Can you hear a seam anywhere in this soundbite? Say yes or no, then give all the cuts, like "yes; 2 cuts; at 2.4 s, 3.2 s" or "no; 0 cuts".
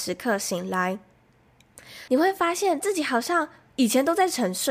yes; 1 cut; at 2.1 s